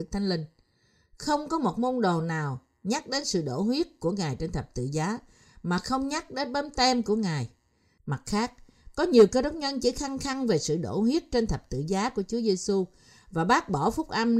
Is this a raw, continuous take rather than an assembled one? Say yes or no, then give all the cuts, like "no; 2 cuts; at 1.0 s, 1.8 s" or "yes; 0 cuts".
no; 1 cut; at 8.0 s